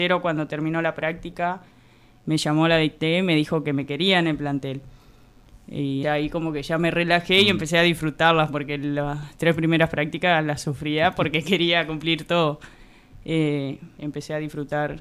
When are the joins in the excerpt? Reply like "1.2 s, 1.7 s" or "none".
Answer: 6.0 s, 14.0 s